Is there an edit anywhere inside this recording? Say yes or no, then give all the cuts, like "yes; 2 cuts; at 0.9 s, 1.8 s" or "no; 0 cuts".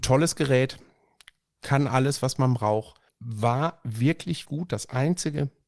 yes; 2 cuts; at 3.1 s, 4.4 s